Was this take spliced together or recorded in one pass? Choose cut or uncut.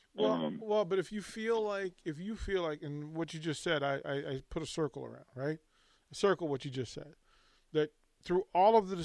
uncut